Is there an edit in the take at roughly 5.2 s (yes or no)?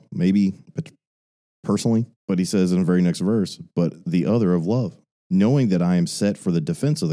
yes